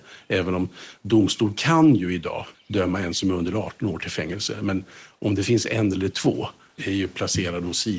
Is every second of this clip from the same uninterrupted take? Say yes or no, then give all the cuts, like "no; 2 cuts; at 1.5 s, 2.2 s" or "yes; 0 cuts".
no; 2 cuts; at 2.5 s, 6.8 s